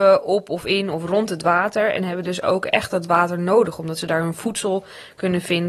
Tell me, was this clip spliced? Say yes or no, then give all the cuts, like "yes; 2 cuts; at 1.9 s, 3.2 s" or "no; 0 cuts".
no; 0 cuts